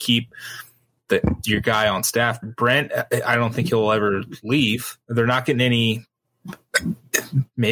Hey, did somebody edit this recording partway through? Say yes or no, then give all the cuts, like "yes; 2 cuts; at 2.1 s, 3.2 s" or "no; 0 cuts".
yes; 2 cuts; at 2.4 s, 5.0 s